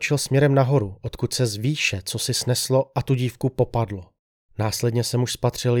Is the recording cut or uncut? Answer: cut